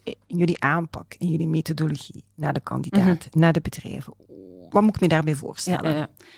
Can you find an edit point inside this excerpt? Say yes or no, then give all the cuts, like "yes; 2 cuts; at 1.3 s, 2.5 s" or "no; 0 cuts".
no; 0 cuts